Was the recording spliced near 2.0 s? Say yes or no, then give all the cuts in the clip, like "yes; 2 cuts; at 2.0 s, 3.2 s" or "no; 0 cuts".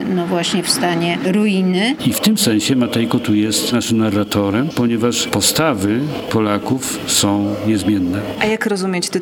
yes; 2 cuts; at 2.0 s, 4.7 s